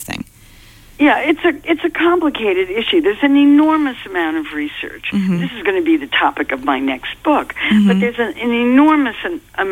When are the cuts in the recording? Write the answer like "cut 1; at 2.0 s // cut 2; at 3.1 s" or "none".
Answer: none